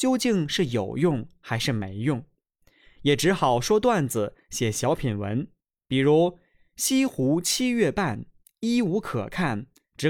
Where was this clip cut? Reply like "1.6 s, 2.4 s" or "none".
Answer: none